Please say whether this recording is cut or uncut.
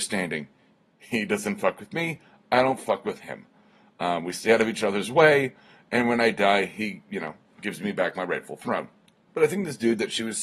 cut